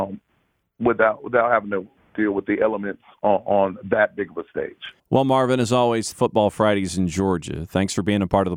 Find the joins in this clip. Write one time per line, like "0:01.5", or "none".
0:05.0
0:06.1